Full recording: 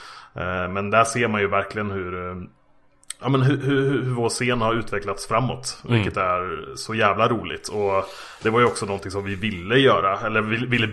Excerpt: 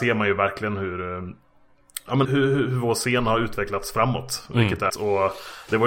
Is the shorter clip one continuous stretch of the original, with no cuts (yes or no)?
no